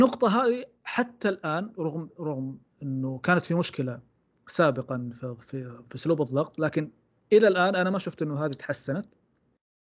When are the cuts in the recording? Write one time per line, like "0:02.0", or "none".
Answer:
none